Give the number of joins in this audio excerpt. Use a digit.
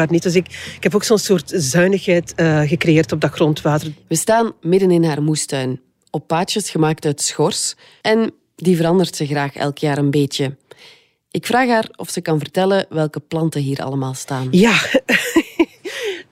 1